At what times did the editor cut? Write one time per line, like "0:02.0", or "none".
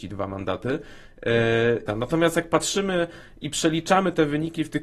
0:01.9